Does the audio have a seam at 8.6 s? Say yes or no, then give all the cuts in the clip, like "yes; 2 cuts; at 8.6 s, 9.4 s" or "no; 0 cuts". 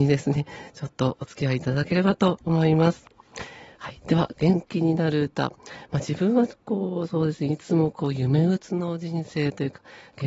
yes; 1 cut; at 8.6 s